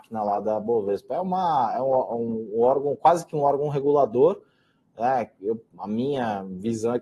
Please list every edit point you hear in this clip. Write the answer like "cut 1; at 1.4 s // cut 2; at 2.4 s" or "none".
none